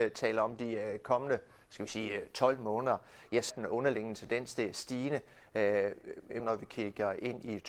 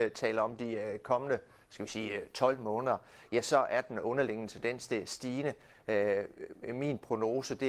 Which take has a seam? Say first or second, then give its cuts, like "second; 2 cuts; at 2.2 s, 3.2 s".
first; 2 cuts; at 3.5 s, 6.4 s